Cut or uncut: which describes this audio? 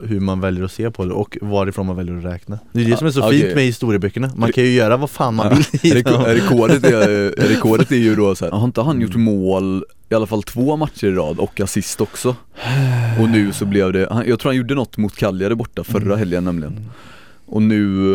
cut